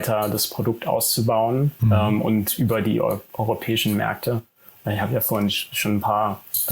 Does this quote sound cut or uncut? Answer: uncut